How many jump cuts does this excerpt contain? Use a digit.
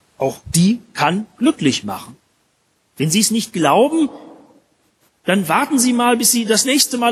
0